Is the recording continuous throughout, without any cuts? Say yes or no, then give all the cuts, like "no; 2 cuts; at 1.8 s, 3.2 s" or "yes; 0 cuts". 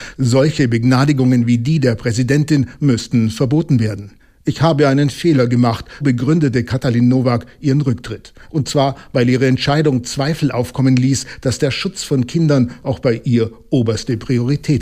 no; 1 cut; at 6.0 s